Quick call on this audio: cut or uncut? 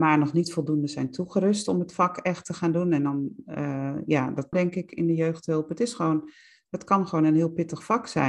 cut